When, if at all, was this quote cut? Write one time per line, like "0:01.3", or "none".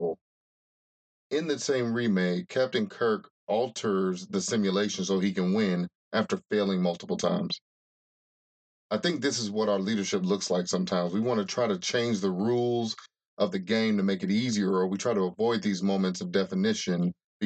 none